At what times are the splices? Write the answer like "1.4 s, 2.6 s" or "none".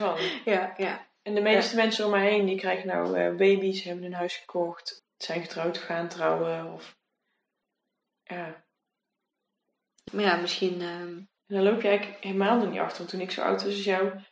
5.0 s, 10.1 s, 11.4 s

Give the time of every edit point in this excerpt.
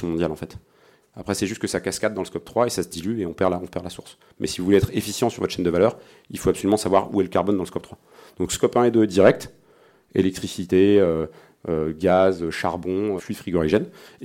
1.0 s, 13.2 s

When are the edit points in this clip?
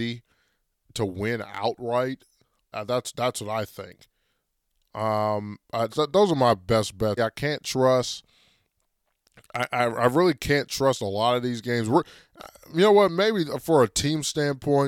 2.7 s, 5.9 s, 7.2 s

